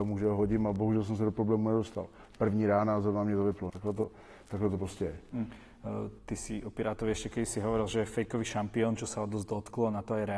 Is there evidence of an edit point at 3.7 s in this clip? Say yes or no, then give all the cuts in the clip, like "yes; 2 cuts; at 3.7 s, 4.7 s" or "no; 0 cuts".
yes; 1 cut; at 3.7 s